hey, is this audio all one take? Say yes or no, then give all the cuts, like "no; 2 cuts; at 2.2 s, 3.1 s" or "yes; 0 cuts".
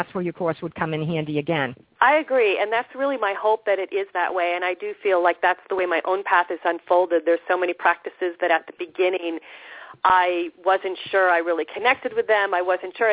no; 1 cut; at 2.0 s